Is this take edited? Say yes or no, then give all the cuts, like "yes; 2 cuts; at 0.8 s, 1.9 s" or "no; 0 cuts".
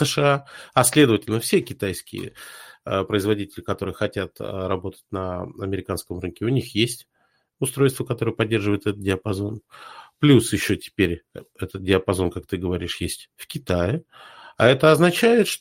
no; 0 cuts